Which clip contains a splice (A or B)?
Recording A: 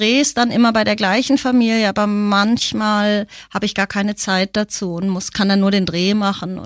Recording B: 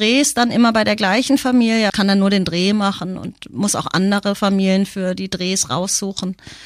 B